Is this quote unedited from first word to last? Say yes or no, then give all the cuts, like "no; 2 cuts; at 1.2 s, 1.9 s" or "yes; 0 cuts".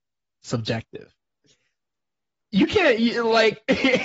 no; 1 cut; at 2.4 s